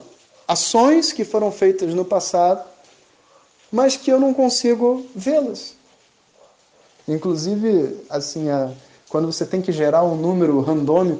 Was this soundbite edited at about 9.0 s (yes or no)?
no